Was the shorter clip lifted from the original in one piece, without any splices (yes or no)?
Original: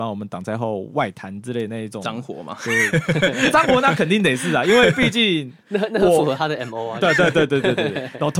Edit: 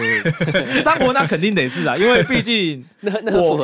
yes